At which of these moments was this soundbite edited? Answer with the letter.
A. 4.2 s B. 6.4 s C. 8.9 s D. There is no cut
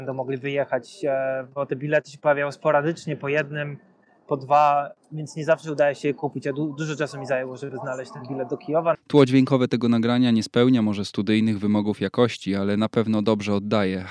C